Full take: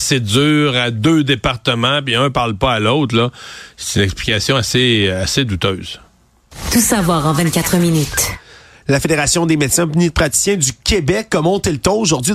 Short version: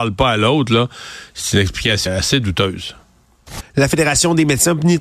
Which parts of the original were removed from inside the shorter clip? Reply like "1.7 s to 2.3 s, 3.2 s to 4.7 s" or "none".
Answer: 4.5 s to 5.1 s, 6.6 s to 8.7 s